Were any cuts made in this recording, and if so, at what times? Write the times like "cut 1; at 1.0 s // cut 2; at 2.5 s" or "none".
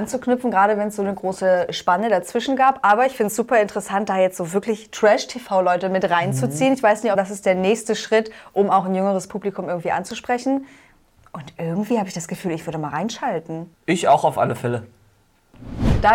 cut 1; at 7.2 s